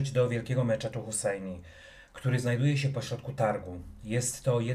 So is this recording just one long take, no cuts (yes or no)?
yes